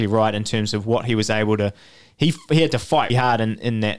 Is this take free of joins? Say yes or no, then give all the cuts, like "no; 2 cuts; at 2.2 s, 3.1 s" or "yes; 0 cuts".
no; 1 cut; at 3.1 s